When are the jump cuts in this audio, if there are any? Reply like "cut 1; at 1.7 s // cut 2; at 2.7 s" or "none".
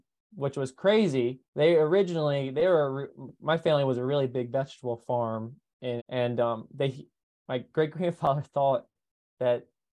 cut 1; at 1.5 s // cut 2; at 6.0 s